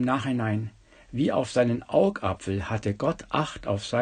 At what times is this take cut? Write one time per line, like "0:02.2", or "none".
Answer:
none